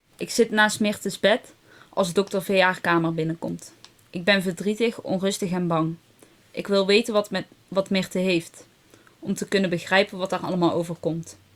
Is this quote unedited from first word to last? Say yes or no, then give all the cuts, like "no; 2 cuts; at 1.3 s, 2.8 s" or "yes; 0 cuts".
yes; 0 cuts